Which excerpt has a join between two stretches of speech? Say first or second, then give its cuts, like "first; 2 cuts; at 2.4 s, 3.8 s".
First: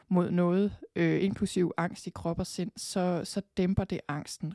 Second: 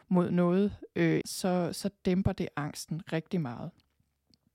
second; 1 cut; at 1.2 s